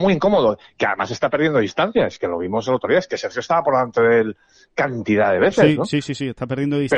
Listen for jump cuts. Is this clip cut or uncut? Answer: uncut